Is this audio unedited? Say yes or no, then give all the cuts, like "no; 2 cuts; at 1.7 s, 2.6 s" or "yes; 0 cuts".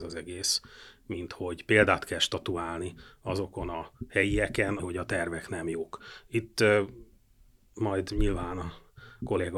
no; 1 cut; at 4.8 s